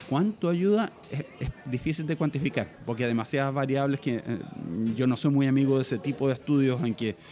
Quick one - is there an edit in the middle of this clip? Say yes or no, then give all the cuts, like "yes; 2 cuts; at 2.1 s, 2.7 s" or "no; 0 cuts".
no; 0 cuts